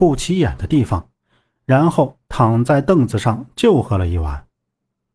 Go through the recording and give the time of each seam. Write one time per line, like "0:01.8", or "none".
none